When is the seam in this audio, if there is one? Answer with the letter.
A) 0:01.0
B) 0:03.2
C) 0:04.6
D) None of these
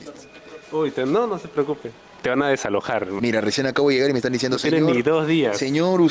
B